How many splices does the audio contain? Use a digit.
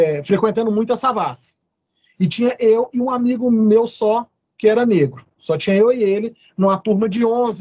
0